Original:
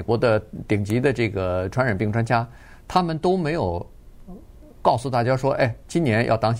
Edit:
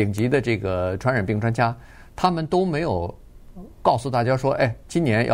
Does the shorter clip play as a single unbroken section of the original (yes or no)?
no